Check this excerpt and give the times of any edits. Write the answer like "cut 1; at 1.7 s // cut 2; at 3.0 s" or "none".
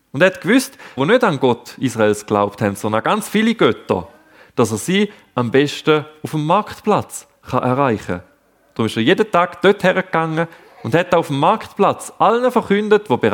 cut 1; at 1.0 s